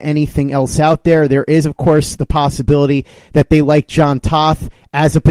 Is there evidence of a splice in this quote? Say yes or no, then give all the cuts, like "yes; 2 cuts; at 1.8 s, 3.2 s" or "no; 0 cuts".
no; 0 cuts